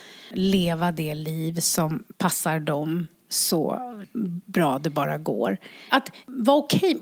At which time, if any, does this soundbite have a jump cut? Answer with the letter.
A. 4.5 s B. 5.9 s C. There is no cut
B